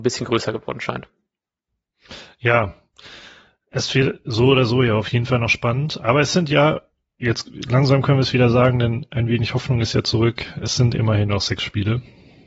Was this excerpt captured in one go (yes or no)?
yes